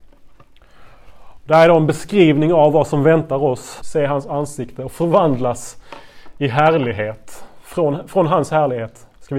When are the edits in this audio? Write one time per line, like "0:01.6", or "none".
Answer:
0:03.8